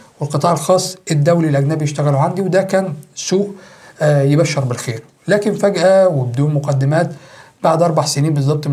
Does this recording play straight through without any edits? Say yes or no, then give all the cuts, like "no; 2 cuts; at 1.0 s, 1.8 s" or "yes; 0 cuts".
yes; 0 cuts